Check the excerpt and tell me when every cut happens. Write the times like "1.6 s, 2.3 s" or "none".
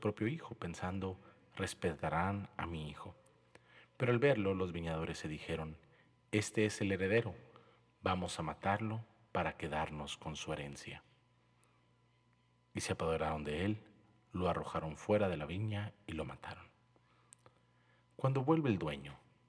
none